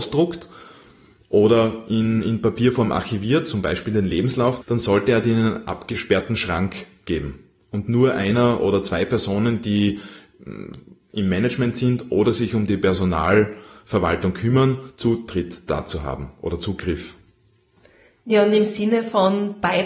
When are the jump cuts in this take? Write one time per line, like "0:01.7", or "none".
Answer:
0:04.6